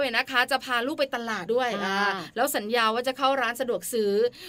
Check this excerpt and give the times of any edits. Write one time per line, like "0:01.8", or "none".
0:01.5